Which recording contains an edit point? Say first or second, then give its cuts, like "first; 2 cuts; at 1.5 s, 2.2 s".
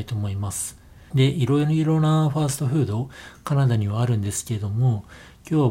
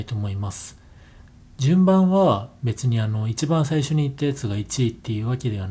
first; 1 cut; at 1.1 s